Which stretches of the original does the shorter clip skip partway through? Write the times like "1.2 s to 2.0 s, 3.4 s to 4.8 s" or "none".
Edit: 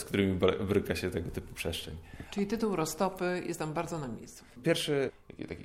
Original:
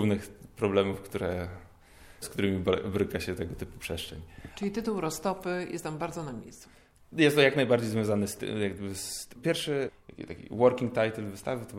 6.8 s to 9.3 s